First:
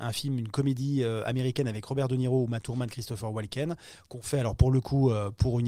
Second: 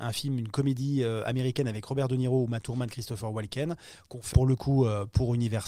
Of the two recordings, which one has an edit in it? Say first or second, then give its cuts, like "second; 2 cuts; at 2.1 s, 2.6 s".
second; 1 cut; at 4.3 s